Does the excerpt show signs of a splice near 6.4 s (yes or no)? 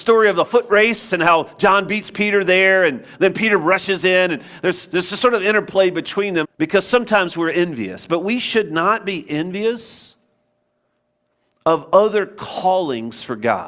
yes